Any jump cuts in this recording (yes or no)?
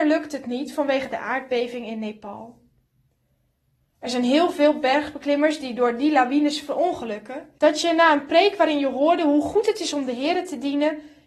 yes